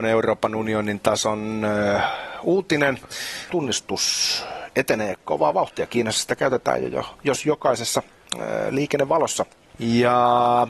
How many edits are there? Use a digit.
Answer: 2